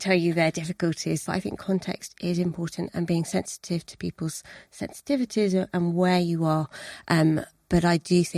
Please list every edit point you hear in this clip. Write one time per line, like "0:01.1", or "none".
0:01.2